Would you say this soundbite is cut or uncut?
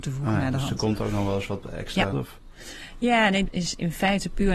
cut